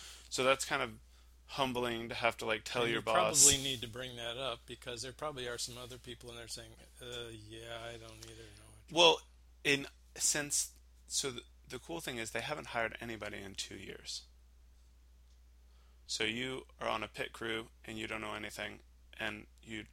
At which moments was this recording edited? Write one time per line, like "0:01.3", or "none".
0:16.1

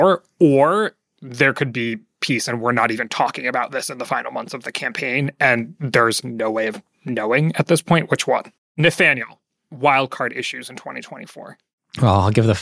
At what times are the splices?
0:06.2
0:08.6

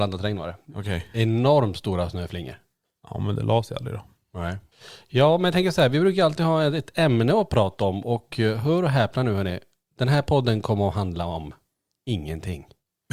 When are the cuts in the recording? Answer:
none

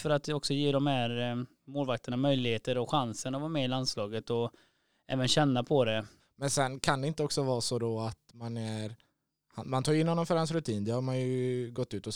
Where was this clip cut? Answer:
0:06.2

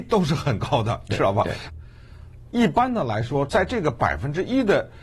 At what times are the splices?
0:01.7
0:03.5

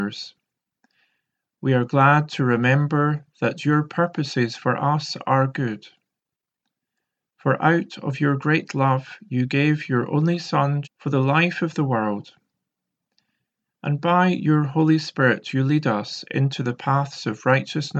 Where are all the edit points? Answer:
0:10.8

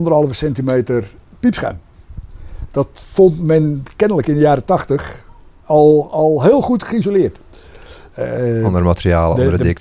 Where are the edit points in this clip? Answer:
0:08.1

